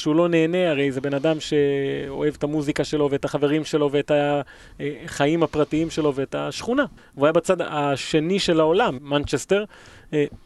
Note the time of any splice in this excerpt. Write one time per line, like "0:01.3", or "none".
0:07.0
0:09.0